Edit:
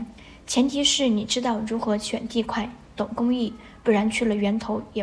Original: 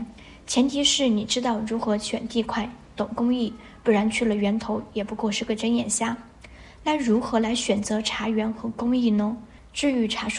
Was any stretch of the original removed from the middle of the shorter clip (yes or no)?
no